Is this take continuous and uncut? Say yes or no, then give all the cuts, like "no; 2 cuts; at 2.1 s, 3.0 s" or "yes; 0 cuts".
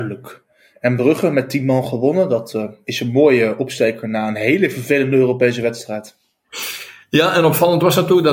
yes; 0 cuts